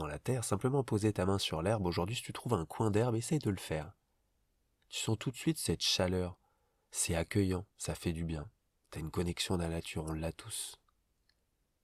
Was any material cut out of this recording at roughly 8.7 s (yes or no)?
no